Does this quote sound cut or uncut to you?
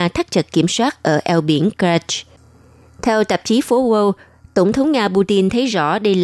uncut